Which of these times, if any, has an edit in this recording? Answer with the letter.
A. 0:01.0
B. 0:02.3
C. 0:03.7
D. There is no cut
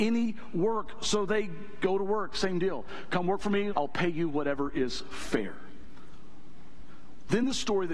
C